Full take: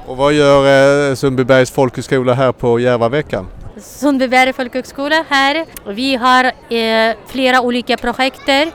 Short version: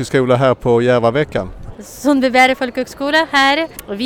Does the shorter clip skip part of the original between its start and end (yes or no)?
no